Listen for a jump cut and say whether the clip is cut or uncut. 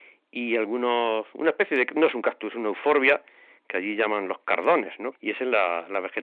cut